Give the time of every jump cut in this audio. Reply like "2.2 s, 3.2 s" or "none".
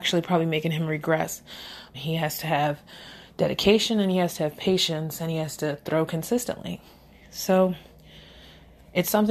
1.9 s